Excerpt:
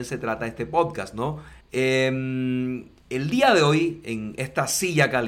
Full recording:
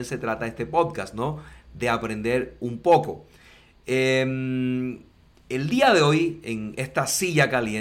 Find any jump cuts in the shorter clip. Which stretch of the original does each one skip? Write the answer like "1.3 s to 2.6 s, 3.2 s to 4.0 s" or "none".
1.6 s to 3.7 s, 5.1 s to 5.4 s